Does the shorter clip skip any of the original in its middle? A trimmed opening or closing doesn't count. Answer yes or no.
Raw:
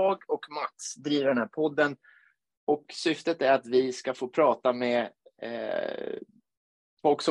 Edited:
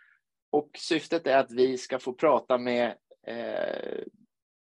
no